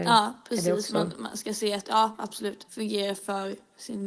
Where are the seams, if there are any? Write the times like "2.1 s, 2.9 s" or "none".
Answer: 2.7 s